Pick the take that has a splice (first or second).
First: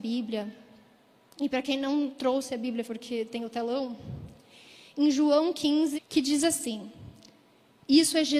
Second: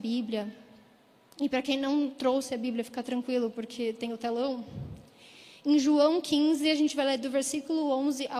first